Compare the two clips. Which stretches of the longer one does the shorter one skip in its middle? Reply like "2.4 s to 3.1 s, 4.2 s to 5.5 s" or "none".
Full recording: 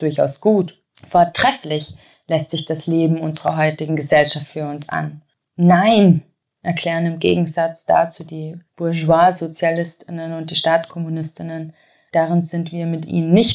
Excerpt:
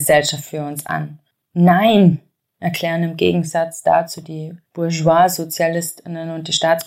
none